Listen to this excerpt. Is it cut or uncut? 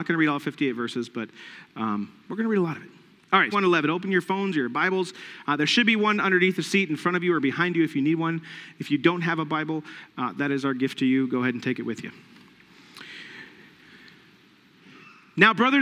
cut